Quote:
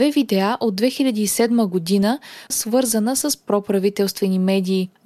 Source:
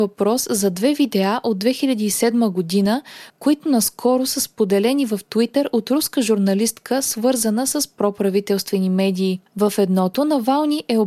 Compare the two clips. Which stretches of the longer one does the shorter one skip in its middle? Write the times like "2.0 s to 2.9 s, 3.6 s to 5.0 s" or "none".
3.3 s to 7.0 s